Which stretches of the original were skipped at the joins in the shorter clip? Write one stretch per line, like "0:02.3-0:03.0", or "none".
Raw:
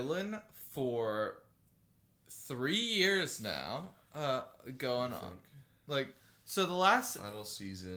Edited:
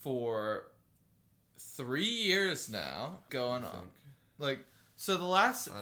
0:04.0-0:04.8